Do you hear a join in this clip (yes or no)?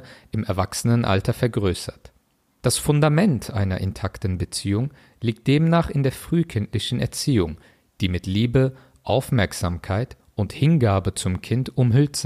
no